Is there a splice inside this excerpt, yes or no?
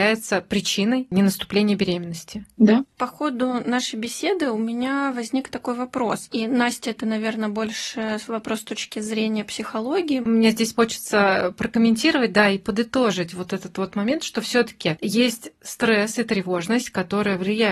yes